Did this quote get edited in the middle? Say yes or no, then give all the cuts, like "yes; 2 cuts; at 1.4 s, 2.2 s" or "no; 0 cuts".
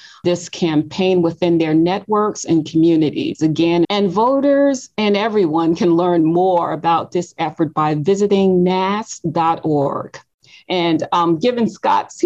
yes; 1 cut; at 3.8 s